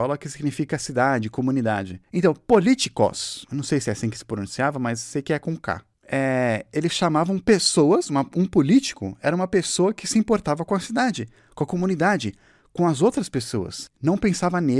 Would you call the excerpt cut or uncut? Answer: uncut